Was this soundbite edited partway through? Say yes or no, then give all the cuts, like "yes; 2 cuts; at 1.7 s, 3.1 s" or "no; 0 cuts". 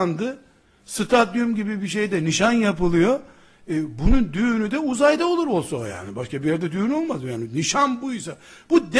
no; 0 cuts